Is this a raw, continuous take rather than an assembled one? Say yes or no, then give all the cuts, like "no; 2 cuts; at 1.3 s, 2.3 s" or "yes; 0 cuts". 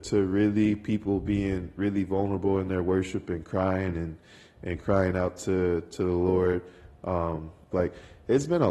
no; 1 cut; at 7.7 s